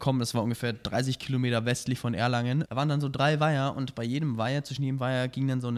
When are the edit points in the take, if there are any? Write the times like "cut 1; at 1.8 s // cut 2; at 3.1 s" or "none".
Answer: cut 1; at 2.7 s